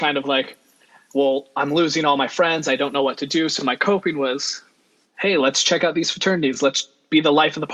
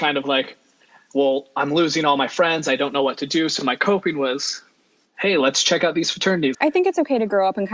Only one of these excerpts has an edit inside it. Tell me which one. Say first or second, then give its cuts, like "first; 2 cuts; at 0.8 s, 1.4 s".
second; 1 cut; at 6.5 s